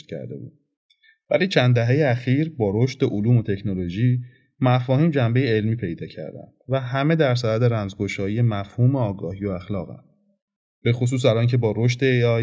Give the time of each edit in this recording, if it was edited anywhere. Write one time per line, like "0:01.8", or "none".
none